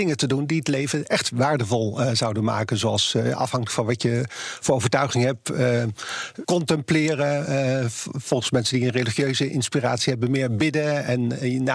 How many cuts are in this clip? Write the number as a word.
one